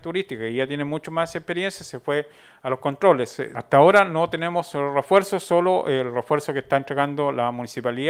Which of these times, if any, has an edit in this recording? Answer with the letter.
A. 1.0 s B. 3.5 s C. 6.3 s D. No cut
B